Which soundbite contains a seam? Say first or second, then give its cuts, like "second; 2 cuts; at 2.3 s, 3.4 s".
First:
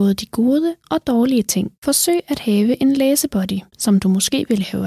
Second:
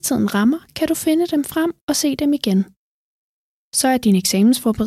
first; 1 cut; at 3.7 s